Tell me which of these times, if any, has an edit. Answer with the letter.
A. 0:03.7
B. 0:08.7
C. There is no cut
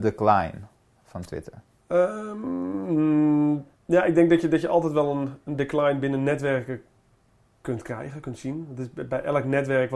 A